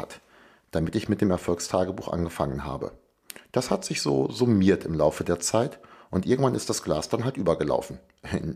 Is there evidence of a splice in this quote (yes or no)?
no